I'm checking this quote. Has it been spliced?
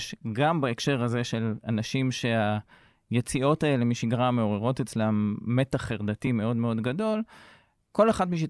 no; 0 cuts

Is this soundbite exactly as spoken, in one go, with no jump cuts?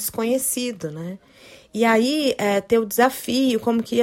yes; 0 cuts

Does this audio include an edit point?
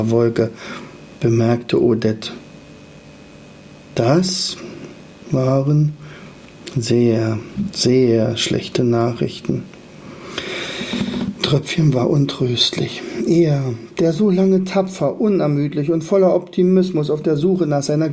no; 0 cuts

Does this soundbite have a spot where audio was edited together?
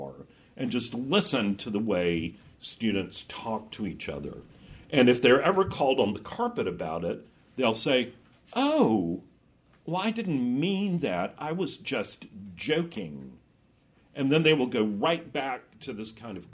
no; 0 cuts

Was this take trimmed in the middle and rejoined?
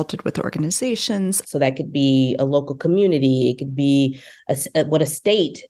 yes; 1 cut; at 1.4 s

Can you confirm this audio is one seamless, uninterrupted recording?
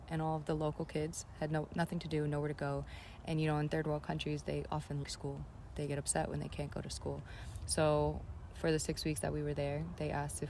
no; 1 cut; at 5.0 s

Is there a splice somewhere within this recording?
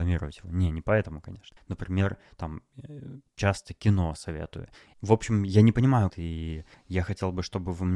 yes; 3 cuts; at 1.6 s, 4.9 s, 6.1 s

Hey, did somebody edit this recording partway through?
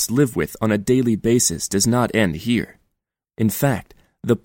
yes; 1 cut; at 3.3 s

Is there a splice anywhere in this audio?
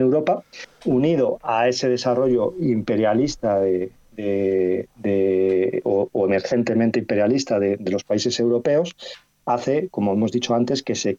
no; 0 cuts

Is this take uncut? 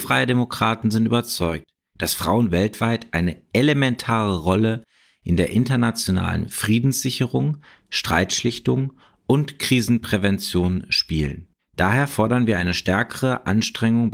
no; 1 cut; at 11.6 s

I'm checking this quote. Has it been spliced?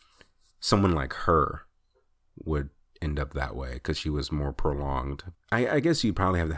yes; 1 cut; at 5.3 s

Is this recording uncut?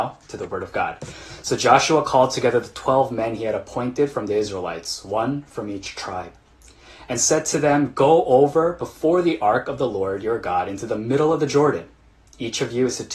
yes; 0 cuts

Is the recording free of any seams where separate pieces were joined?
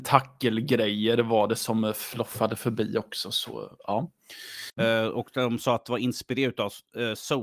no; 1 cut; at 4.8 s

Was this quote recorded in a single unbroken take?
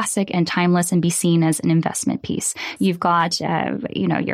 no; 1 cut; at 2.8 s

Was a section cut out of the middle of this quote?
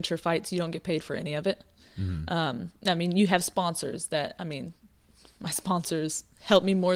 no; 0 cuts

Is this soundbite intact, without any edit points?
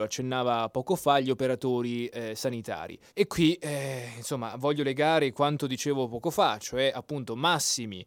no; 1 cut; at 3.1 s

